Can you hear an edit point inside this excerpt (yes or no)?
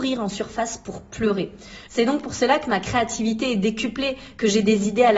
yes